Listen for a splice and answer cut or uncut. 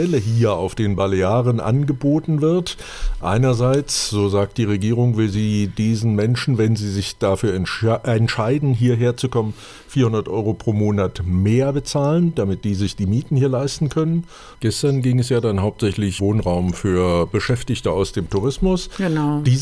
cut